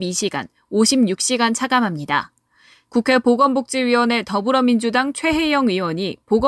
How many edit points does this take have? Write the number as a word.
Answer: one